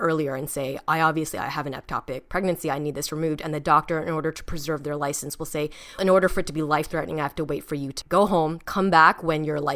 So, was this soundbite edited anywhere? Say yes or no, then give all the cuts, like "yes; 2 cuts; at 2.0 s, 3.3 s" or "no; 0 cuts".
yes; 2 cuts; at 6.0 s, 8.0 s